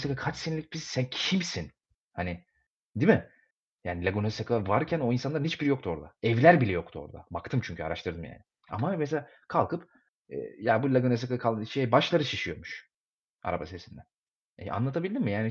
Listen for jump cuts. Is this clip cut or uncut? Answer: uncut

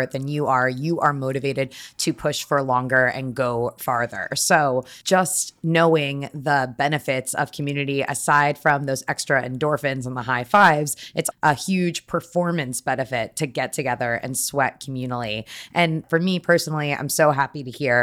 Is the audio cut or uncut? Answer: cut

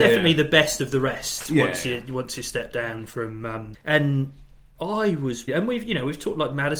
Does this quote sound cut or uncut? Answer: cut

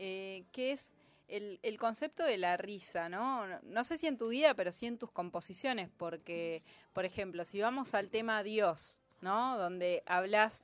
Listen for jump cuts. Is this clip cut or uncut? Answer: uncut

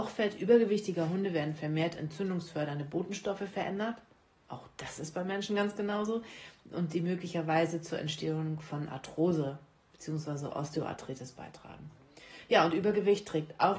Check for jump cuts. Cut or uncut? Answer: uncut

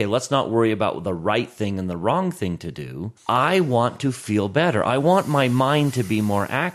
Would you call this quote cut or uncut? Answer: cut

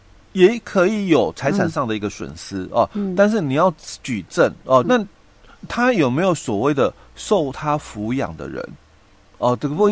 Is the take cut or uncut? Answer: cut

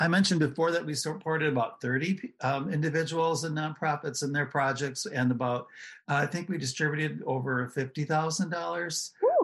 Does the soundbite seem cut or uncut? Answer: uncut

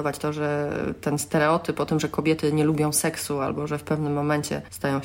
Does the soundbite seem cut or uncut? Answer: uncut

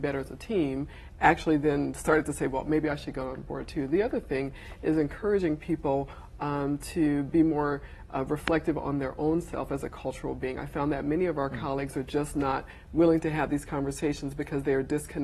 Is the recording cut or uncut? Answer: uncut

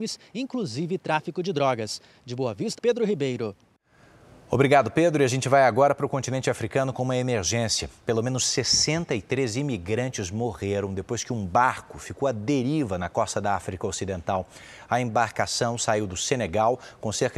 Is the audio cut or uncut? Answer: cut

